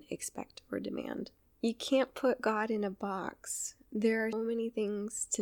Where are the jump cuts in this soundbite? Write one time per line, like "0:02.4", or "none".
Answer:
0:01.4
0:04.3